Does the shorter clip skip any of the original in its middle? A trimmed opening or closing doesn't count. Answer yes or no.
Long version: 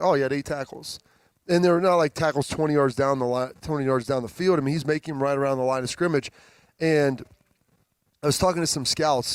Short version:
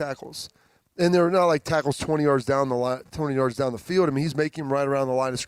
no